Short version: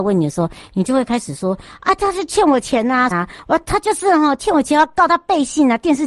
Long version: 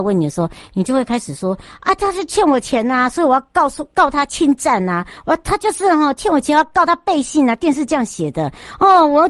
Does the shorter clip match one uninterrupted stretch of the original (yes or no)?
no